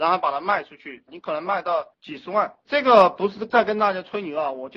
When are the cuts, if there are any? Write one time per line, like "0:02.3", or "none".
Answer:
0:01.1